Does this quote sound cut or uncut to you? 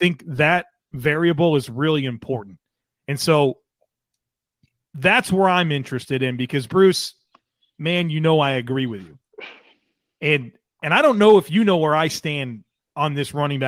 uncut